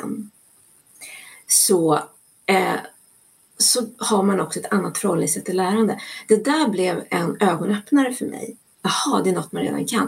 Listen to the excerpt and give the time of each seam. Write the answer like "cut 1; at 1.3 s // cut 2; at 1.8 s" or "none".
none